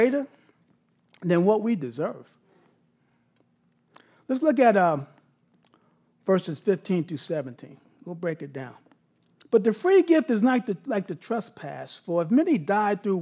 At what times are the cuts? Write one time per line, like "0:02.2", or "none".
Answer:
none